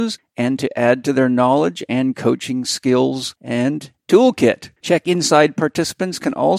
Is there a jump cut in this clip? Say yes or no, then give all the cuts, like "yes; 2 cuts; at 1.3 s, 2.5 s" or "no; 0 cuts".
yes; 1 cut; at 4.8 s